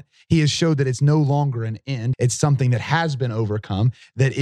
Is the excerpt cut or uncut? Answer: cut